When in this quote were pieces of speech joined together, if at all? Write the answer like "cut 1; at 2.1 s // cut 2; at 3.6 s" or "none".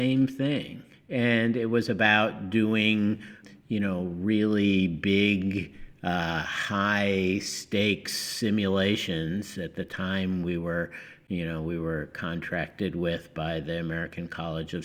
none